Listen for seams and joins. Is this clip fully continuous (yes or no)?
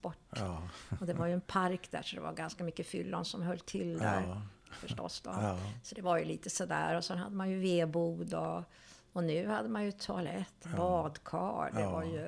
yes